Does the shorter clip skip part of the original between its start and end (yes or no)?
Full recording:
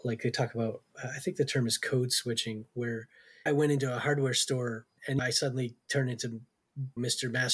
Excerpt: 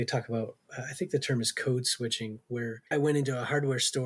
yes